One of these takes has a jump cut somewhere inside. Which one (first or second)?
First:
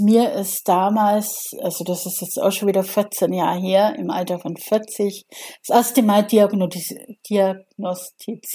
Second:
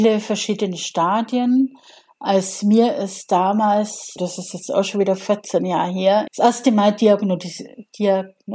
second